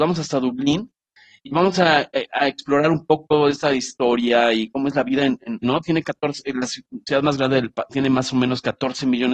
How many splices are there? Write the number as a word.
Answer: two